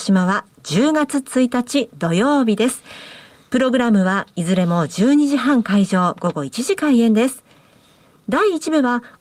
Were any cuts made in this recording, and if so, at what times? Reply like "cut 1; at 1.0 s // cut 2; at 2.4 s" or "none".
none

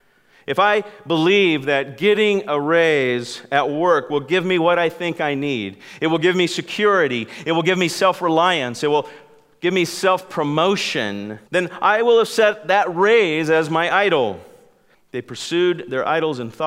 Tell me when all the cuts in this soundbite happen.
cut 1; at 11.5 s // cut 2; at 14.9 s

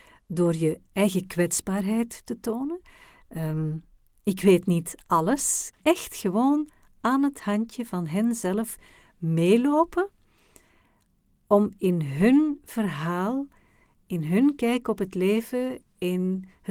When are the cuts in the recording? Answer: cut 1; at 5.7 s

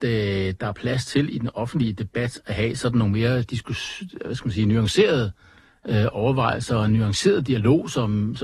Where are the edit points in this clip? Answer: none

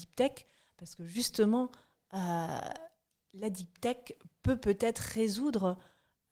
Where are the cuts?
none

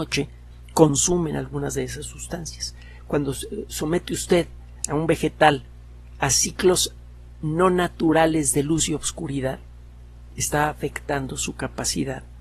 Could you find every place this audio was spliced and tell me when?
cut 1; at 4.8 s

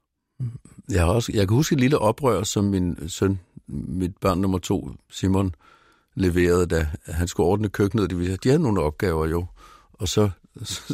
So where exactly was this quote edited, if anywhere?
none

